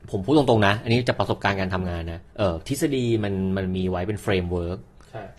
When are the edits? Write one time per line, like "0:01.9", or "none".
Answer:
0:02.3